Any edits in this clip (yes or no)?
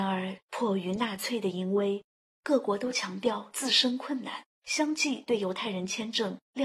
yes